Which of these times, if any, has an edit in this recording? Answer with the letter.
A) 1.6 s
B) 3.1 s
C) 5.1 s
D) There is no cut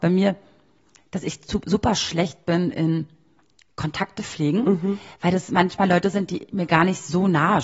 D